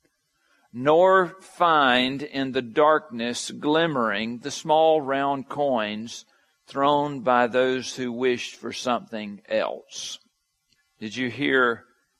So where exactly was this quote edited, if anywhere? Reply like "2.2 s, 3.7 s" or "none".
10.8 s